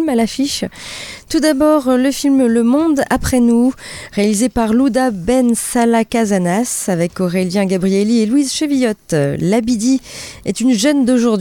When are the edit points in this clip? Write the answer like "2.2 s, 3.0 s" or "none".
none